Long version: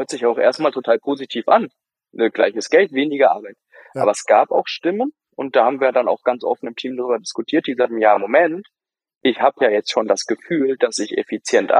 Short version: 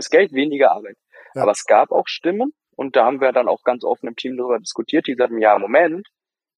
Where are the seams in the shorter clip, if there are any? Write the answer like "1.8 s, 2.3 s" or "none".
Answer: none